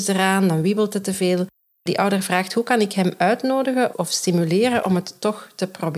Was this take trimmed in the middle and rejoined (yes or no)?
yes